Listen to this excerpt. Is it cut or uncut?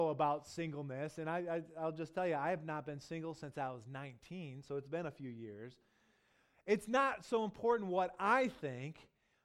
uncut